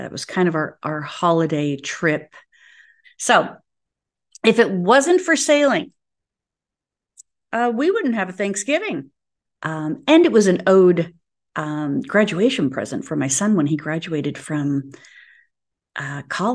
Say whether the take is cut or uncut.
cut